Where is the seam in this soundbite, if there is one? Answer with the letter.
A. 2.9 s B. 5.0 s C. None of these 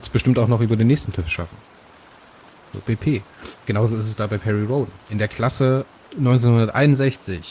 A